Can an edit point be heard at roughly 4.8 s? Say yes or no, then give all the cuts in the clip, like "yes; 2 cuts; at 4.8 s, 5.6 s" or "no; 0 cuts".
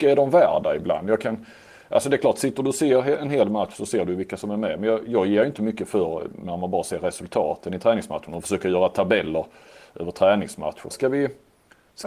no; 1 cut; at 10.9 s